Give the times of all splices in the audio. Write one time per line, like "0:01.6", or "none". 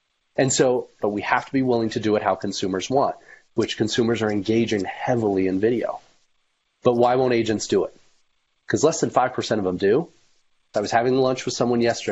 0:01.0
0:10.7